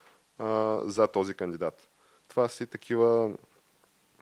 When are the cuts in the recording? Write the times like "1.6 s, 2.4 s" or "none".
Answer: 2.2 s

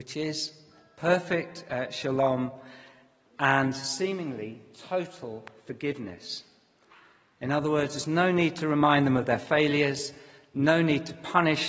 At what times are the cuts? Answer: none

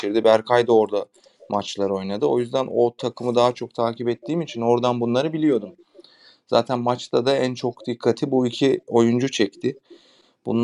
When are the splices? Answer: none

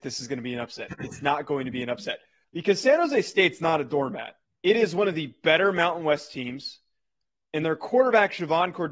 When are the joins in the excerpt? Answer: 2.4 s, 4.4 s

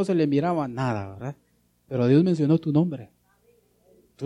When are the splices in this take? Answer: 1.7 s

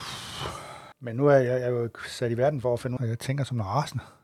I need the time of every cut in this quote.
0.9 s, 3.0 s

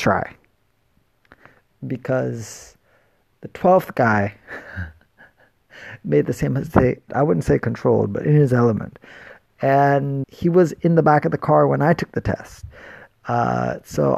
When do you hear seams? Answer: 7.1 s, 10.2 s

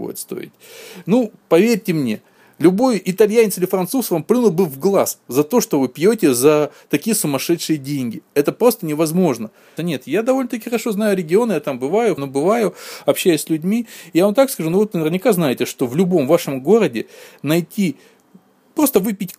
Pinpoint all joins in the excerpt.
9.8 s, 12.2 s, 14.9 s

